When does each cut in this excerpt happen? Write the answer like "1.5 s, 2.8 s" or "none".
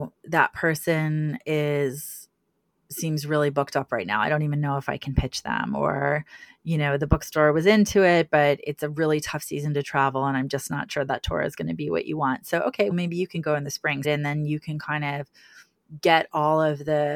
12.9 s, 14.0 s